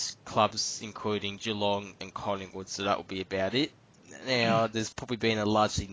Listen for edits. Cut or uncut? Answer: uncut